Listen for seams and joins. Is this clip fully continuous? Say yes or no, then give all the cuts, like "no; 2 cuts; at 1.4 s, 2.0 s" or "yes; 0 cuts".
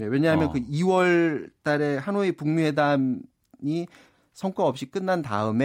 yes; 0 cuts